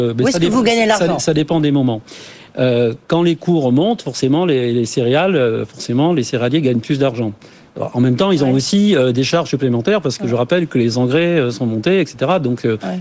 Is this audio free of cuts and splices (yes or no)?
yes